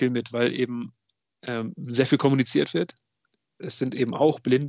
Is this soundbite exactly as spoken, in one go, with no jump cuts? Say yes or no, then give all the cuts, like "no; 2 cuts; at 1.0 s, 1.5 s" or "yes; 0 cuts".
yes; 0 cuts